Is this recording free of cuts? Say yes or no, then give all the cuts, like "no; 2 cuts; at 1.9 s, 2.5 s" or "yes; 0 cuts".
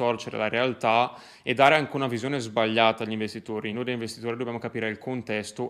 yes; 0 cuts